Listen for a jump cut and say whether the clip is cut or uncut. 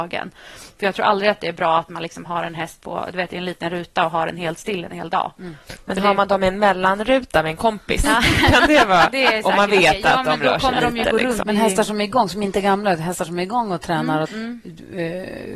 cut